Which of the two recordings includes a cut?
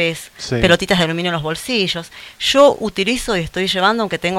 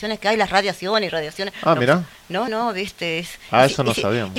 second; 1 cut; at 2.5 s

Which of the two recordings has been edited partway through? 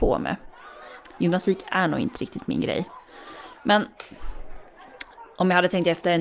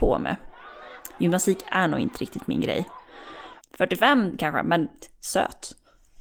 second; 1 cut; at 3.6 s

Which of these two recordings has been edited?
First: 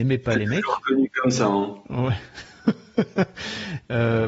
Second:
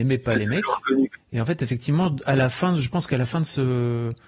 second; 1 cut; at 1.1 s

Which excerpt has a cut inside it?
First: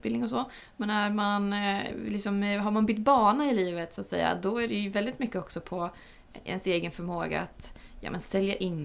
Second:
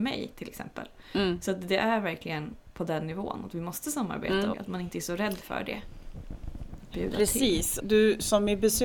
second; 2 cuts; at 4.5 s, 7.8 s

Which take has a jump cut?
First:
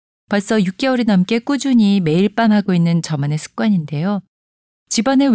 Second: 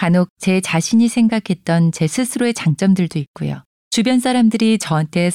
second; 1 cut; at 3.8 s

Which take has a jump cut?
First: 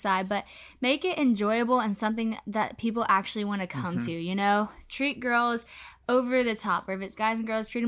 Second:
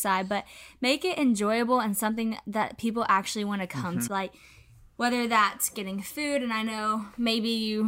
second; 1 cut; at 4.1 s

